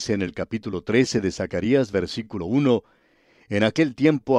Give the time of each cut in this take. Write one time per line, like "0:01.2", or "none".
none